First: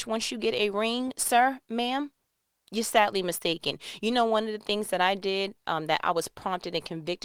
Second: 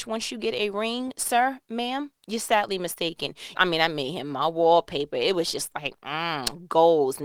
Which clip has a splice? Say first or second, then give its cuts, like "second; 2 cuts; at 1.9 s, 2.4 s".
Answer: second; 2 cuts; at 2.2 s, 3.5 s